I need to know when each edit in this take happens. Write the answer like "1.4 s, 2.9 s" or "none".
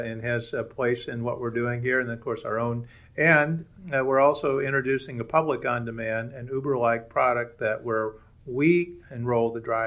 none